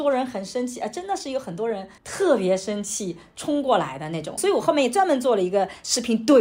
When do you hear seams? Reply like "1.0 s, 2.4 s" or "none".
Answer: 2.0 s, 4.4 s